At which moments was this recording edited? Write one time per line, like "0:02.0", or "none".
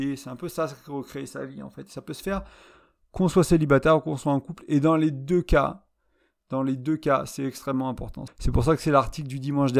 0:08.3